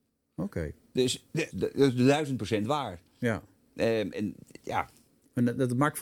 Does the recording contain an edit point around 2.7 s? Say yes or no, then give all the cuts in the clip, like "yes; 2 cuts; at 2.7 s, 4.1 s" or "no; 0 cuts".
no; 2 cuts; at 1.5 s, 4.1 s